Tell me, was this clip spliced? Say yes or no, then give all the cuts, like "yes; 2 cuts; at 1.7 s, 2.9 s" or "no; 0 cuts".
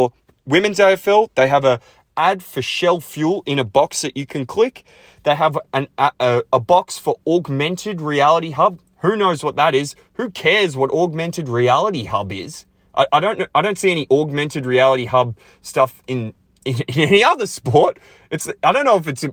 no; 0 cuts